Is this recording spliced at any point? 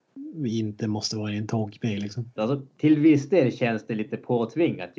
yes; 1 cut; at 2.4 s

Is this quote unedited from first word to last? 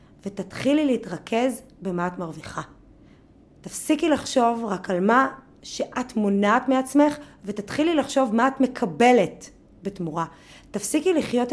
yes; 0 cuts

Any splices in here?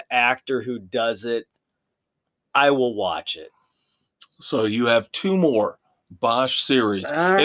no; 0 cuts

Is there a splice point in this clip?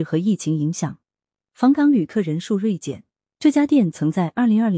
no; 0 cuts

